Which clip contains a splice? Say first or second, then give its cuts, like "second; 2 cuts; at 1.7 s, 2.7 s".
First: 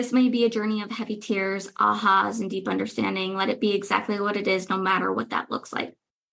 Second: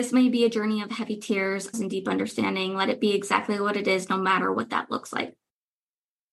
second; 1 cut; at 1.7 s